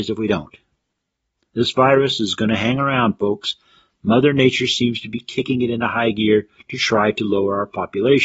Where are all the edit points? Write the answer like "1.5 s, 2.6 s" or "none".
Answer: none